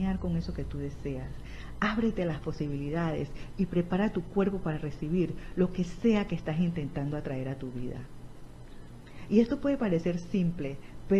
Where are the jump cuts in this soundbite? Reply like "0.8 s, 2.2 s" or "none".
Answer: none